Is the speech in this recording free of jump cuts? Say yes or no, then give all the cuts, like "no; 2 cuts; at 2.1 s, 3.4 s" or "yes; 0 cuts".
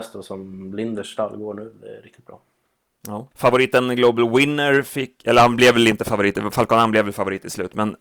no; 1 cut; at 3.3 s